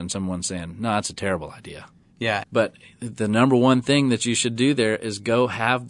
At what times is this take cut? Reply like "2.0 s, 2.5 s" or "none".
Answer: 2.4 s